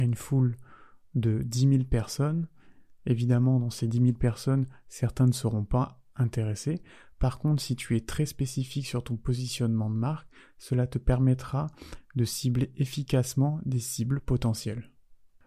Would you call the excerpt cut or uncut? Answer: uncut